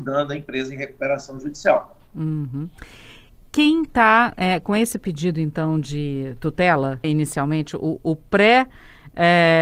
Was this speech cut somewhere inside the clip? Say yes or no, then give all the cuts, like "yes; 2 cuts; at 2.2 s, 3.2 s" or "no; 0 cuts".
yes; 1 cut; at 7.0 s